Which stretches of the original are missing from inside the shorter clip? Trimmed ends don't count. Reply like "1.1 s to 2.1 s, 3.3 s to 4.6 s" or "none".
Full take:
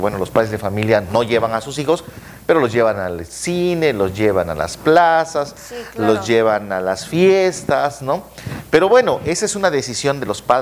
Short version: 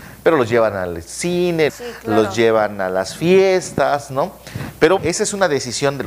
3.9 s to 5.6 s, 8.9 s to 9.2 s